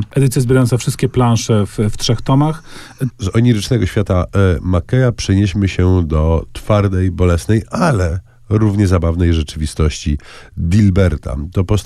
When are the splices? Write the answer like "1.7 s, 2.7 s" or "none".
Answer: 3.1 s